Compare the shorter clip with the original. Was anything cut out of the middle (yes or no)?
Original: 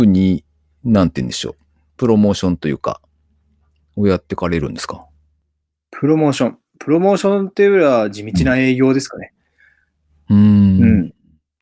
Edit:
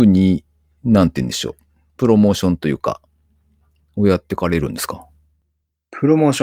no